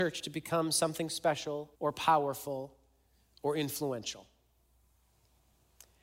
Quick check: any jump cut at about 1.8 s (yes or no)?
yes